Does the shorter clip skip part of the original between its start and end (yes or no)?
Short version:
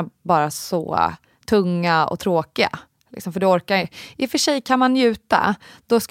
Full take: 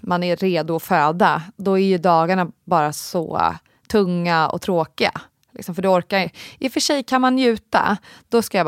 no